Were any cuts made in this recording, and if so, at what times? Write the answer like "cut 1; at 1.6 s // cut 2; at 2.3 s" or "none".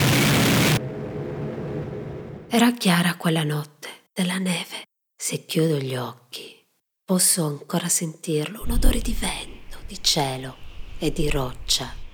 cut 1; at 4.1 s